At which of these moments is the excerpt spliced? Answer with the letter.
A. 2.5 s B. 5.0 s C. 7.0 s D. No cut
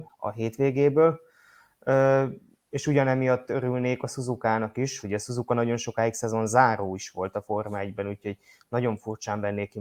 B